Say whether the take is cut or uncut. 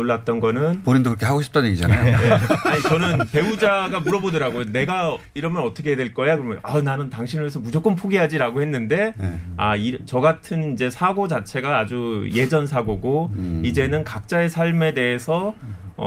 uncut